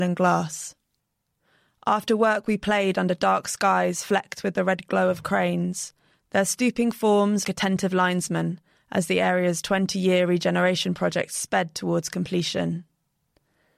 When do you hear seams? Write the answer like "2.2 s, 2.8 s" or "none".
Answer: 7.4 s